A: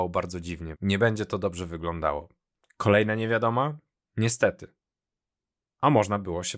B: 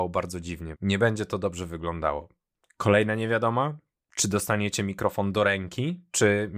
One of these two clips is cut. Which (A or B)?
A